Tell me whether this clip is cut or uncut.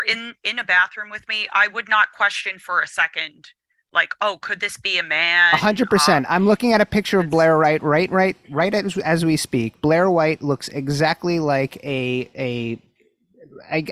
uncut